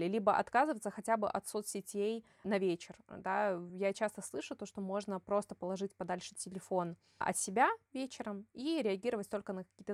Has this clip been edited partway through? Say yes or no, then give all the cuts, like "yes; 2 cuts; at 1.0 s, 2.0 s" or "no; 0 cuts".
no; 0 cuts